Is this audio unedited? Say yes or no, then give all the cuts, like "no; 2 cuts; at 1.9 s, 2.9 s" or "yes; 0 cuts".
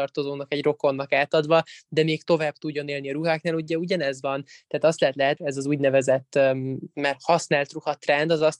no; 1 cut; at 5.4 s